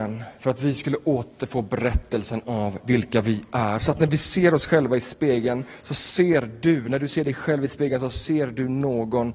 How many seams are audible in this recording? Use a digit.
0